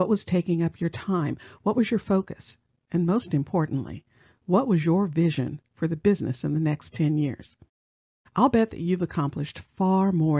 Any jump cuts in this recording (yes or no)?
no